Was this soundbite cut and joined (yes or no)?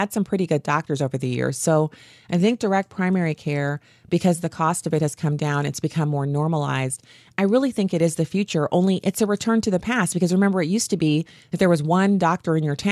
no